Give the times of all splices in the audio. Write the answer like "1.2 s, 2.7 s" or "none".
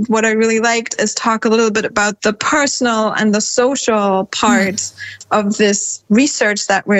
none